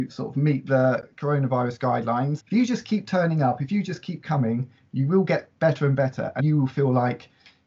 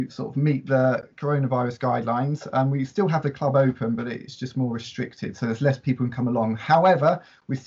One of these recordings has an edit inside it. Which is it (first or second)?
first